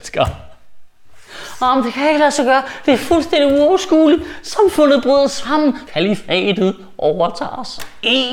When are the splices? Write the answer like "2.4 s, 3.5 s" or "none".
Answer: 5.9 s